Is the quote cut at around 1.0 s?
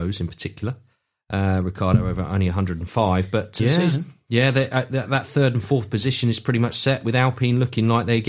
no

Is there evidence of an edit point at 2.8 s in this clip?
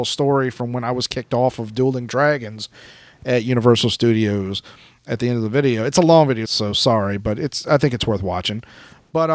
no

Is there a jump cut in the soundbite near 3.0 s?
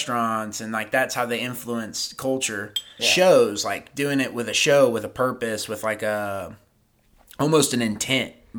yes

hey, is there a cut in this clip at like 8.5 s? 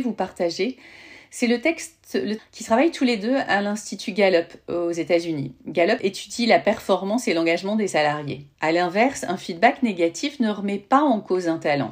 yes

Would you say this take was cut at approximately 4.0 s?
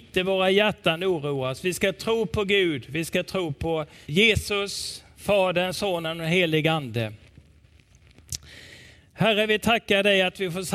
yes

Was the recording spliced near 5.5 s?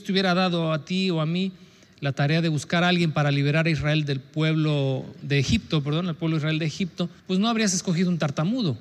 no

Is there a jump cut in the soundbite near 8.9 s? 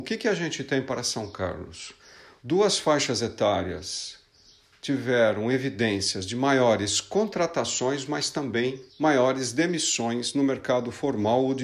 yes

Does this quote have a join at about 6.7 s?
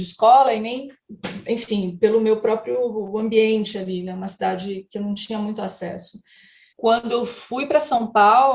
yes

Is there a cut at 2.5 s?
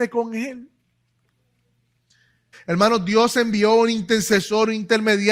yes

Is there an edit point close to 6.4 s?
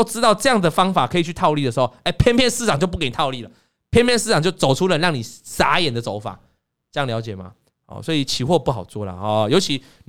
no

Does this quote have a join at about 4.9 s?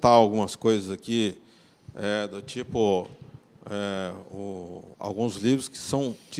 yes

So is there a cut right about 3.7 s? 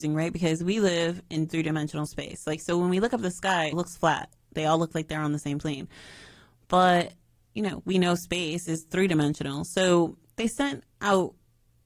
yes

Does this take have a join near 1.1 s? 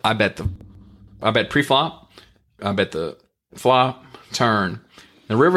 no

